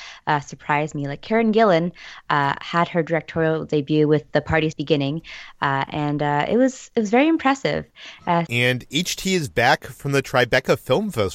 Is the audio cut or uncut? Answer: cut